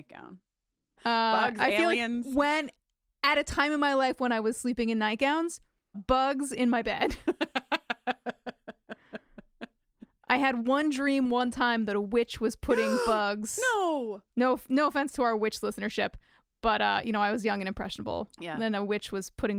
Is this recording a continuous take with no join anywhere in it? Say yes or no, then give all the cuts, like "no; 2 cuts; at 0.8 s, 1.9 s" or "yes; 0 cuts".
no; 2 cuts; at 1.0 s, 5.9 s